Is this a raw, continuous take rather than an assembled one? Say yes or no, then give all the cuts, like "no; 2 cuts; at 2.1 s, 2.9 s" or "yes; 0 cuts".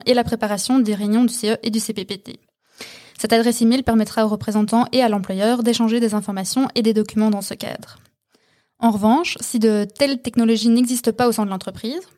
yes; 0 cuts